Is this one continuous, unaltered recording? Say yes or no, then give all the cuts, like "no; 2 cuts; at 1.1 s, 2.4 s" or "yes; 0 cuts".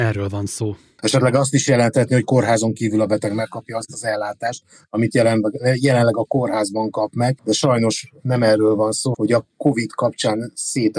no; 1 cut; at 9.1 s